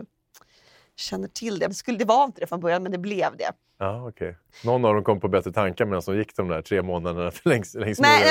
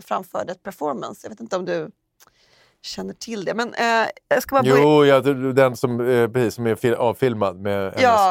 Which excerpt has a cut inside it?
first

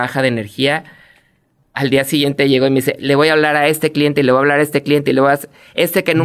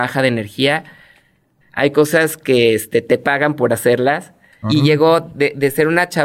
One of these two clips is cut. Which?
second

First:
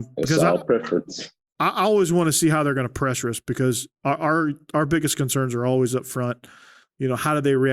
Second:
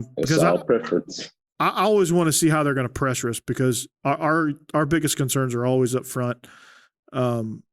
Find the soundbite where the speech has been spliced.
first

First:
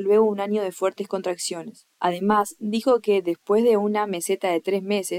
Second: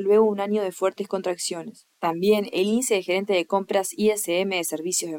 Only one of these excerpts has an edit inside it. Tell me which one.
second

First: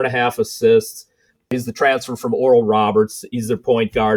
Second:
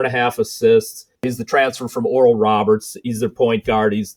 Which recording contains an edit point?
second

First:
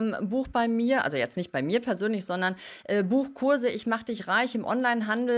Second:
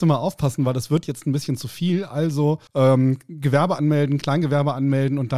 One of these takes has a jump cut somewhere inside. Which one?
second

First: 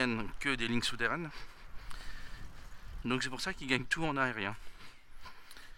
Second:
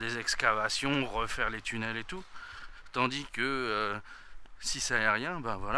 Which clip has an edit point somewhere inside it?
first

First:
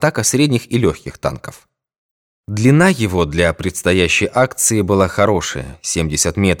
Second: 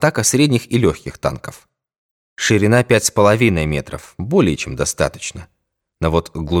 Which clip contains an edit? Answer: second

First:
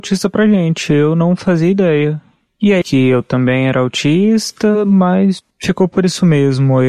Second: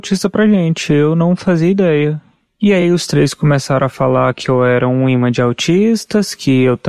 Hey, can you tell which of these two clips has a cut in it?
first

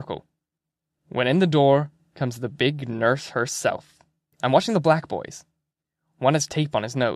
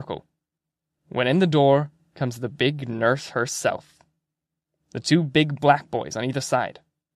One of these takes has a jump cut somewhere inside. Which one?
first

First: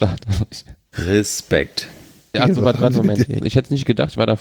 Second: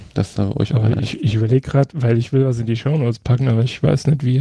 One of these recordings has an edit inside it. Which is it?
first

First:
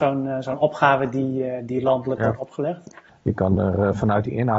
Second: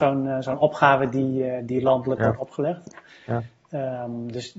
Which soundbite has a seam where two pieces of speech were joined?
first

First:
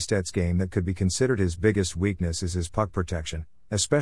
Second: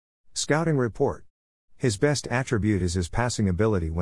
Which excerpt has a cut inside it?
second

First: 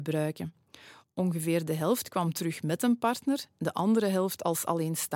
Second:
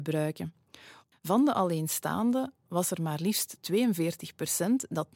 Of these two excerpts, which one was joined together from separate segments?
second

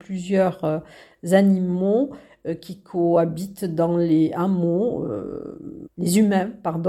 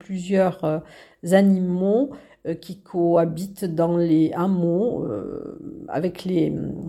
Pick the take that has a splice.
first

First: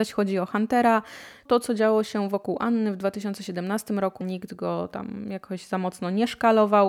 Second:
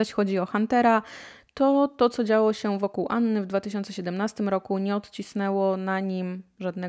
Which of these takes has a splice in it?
first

